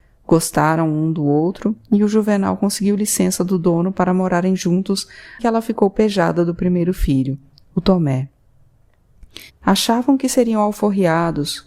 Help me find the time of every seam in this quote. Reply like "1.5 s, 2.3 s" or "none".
5.4 s, 9.5 s